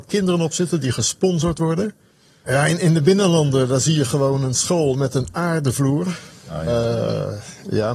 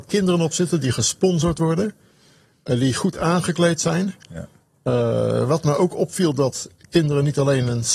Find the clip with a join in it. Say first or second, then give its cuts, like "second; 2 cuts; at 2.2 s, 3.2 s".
first; 1 cut; at 2.5 s